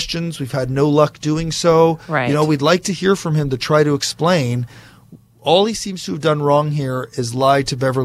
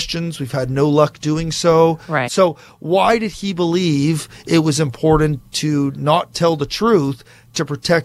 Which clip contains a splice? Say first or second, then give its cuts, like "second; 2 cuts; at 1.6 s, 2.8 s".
second; 1 cut; at 2.2 s